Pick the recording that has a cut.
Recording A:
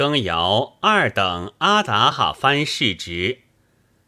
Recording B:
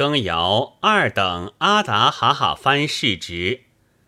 A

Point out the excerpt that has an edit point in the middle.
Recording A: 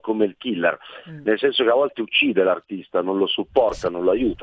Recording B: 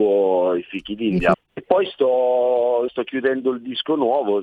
B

